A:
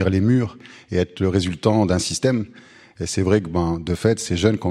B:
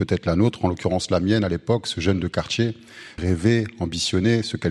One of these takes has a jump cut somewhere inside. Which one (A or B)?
B